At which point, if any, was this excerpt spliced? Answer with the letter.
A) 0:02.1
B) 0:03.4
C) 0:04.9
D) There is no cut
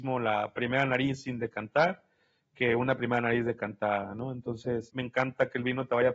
C